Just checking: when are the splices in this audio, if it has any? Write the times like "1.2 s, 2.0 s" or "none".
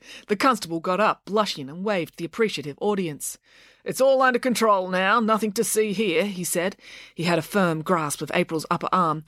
none